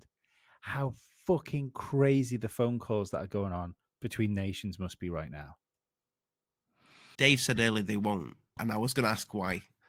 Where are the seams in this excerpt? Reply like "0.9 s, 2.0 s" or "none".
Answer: 7.1 s, 8.6 s